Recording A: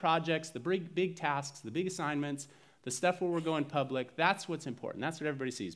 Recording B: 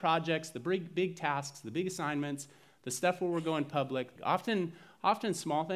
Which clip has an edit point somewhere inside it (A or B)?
B